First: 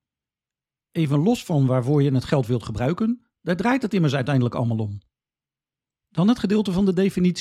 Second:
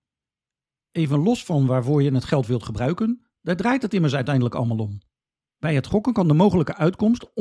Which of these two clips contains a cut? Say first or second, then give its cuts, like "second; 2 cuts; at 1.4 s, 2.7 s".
second; 1 cut; at 5.5 s